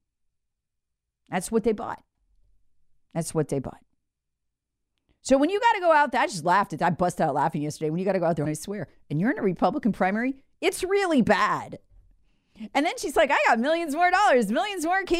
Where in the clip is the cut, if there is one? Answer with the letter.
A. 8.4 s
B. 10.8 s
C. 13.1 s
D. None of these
A